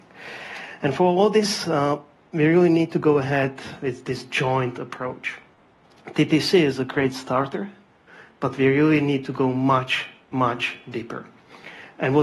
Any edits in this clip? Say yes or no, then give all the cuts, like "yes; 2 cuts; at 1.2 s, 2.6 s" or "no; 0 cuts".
no; 0 cuts